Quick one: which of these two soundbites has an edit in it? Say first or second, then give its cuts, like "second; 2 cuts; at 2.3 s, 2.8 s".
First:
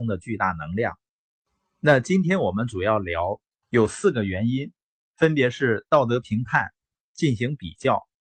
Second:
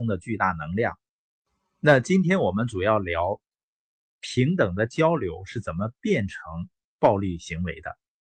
first; 1 cut; at 3.6 s